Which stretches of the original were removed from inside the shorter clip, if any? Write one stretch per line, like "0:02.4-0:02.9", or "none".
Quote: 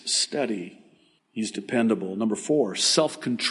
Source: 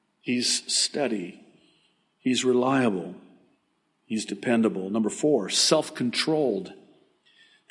0:01.8-0:03.9